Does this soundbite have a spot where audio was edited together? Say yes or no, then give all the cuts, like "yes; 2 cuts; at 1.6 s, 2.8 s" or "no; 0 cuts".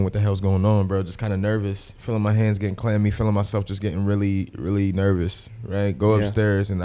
no; 0 cuts